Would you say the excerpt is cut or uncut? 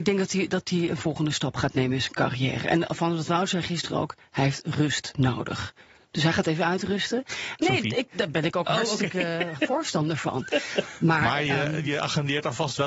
cut